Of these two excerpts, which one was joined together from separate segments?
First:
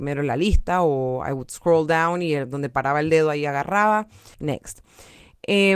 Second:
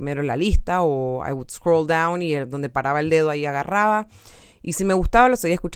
first; 1 cut; at 4.3 s

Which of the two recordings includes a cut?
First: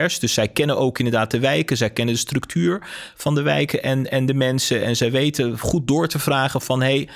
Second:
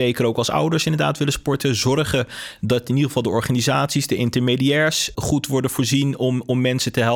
second; 1 cut; at 5.1 s

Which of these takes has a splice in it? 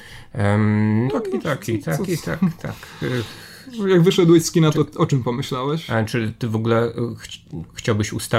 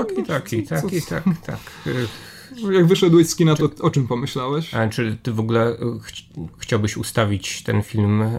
first; 1 cut; at 1.1 s

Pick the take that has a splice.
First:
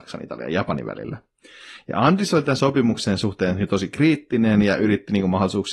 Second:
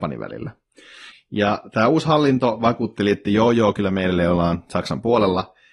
second; 1 cut; at 1.1 s

